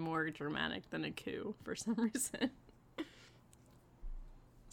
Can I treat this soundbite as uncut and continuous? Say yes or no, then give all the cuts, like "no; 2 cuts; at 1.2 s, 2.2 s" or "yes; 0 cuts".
yes; 0 cuts